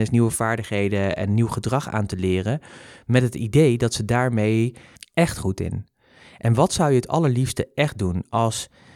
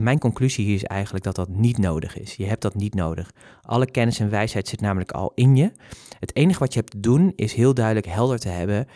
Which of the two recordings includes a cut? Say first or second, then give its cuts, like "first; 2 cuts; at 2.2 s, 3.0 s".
first; 1 cut; at 5.0 s